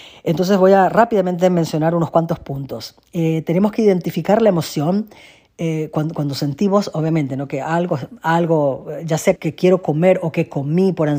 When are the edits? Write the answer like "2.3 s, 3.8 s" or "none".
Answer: 9.4 s